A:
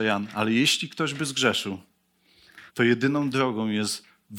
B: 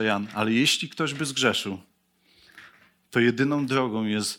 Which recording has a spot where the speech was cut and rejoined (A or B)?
A